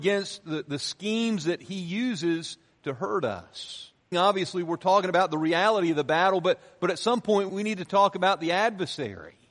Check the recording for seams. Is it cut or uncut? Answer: cut